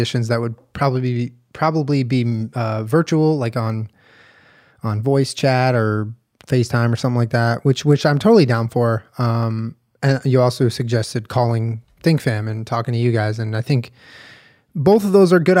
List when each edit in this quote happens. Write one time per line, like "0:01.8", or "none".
none